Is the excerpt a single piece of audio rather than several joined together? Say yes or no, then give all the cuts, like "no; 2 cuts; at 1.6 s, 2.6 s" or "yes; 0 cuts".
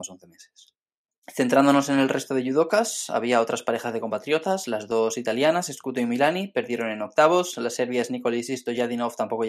yes; 0 cuts